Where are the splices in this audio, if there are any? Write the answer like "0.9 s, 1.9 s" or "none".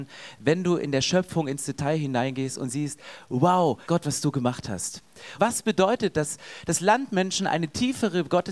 3.9 s, 5.4 s